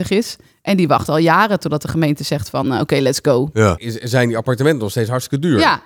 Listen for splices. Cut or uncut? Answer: cut